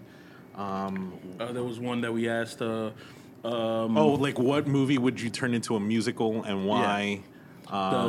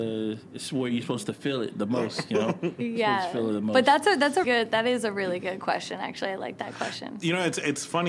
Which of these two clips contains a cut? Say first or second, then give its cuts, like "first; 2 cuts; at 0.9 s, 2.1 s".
second; 1 cut; at 4.4 s